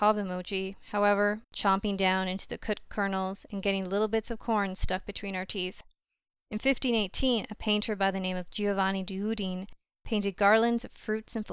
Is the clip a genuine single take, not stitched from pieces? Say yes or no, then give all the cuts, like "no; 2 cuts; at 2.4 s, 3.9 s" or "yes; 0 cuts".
no; 2 cuts; at 1.4 s, 6.4 s